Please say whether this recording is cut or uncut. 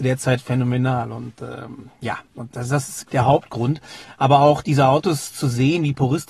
cut